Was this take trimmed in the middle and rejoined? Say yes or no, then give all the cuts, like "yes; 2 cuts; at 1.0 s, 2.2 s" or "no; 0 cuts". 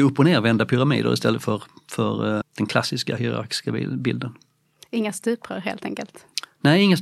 yes; 1 cut; at 2.4 s